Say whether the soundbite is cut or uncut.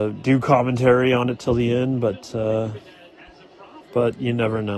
cut